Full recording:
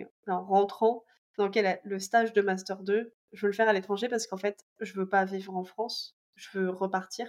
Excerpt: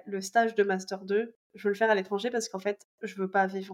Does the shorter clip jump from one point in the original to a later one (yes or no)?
no